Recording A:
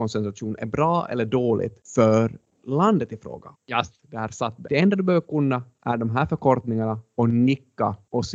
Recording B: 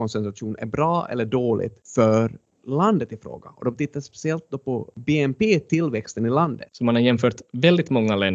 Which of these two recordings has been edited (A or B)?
A